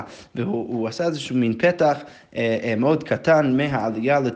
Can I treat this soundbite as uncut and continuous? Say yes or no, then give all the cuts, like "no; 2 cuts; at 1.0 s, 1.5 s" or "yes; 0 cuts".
yes; 0 cuts